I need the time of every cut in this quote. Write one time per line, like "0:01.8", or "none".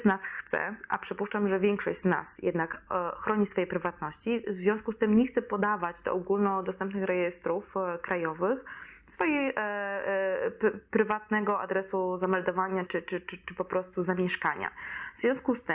0:12.9